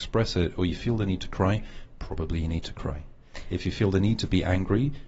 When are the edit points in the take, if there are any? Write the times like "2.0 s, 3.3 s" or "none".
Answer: none